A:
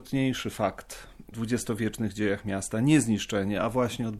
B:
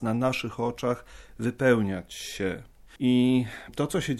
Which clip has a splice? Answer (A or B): B